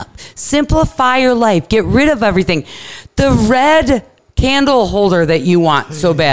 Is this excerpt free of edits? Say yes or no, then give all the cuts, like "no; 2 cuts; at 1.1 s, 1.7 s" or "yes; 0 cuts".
yes; 0 cuts